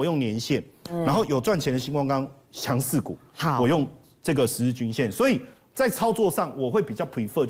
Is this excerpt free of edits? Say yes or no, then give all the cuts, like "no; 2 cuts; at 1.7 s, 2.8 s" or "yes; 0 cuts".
yes; 0 cuts